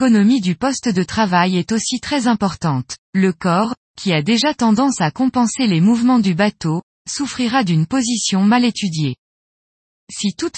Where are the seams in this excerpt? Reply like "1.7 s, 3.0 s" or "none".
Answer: 3.0 s

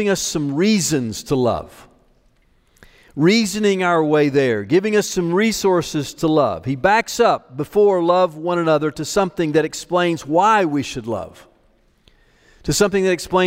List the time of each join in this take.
none

